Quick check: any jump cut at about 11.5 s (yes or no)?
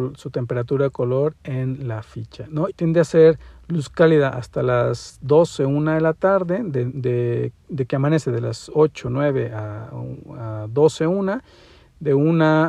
no